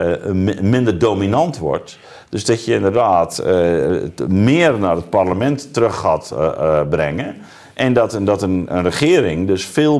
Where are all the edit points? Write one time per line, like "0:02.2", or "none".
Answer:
none